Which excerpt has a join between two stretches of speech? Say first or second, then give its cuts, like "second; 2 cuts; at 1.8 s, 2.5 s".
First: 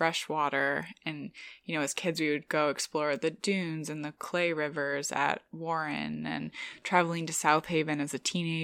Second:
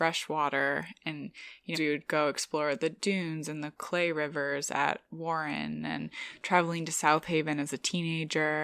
second; 1 cut; at 1.7 s